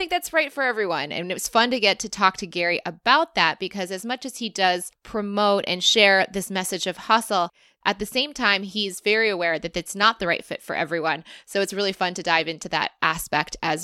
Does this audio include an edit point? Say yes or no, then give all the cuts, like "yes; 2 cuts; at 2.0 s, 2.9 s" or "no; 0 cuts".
no; 0 cuts